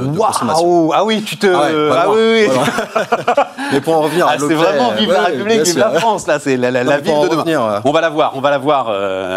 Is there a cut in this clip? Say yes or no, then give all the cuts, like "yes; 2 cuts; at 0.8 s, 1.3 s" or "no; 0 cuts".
yes; 1 cut; at 3.3 s